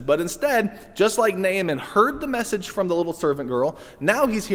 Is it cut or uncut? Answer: uncut